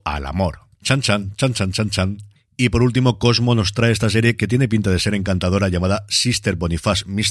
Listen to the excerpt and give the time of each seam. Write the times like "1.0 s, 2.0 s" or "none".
none

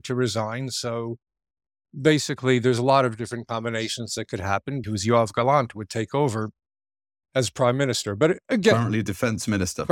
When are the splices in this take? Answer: 4.8 s

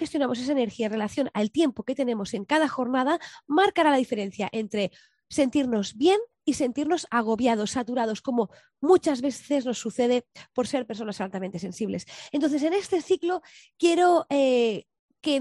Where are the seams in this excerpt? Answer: none

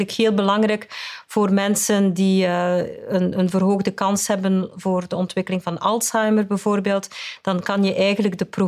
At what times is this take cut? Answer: none

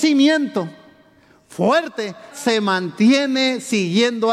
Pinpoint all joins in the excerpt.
2.3 s

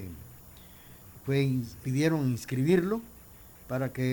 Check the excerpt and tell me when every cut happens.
1.8 s

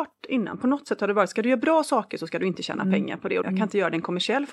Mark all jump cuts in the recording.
3.4 s

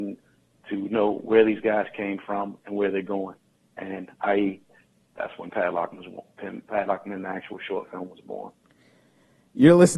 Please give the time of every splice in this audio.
none

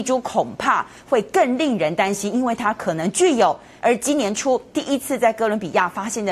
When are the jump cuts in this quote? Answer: 3.8 s

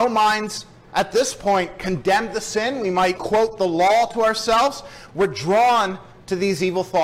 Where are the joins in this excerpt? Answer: 3.2 s, 5.1 s

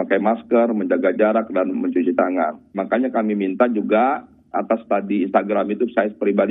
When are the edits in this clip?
2.7 s

